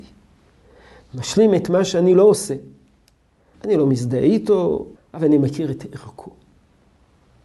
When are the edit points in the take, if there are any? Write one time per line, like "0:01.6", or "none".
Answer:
0:03.5
0:04.9

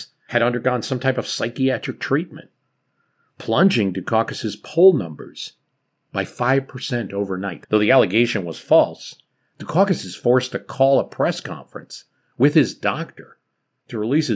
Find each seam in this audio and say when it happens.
0:07.6

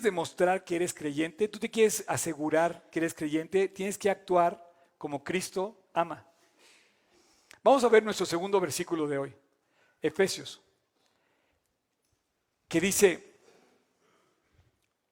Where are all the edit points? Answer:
none

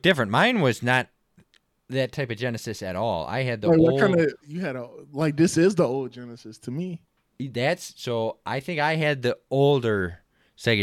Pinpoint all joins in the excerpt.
0:04.4

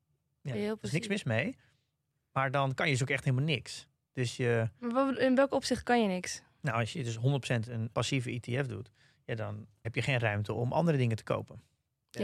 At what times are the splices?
0:07.9
0:09.8

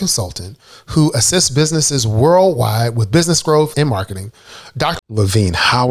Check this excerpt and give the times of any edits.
0:03.7
0:05.0

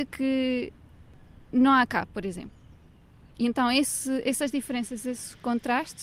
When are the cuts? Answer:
none

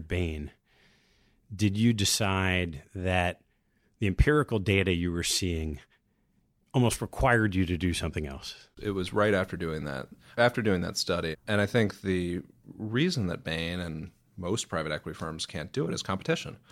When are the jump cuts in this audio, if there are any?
0:11.3

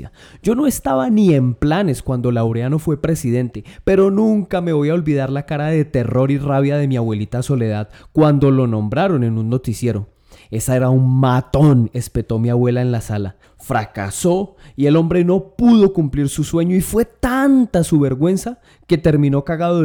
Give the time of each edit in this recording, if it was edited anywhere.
0:13.4

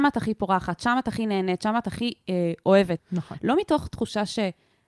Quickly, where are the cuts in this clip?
0:03.0

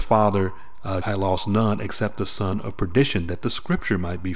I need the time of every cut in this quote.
0:01.0

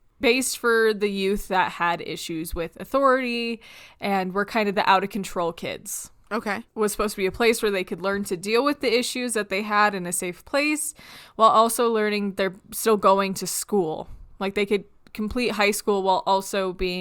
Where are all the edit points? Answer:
none

